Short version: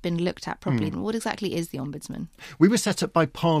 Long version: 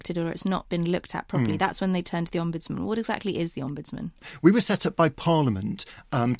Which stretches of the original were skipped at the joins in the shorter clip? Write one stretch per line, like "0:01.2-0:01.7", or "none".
0:01.6-0:02.7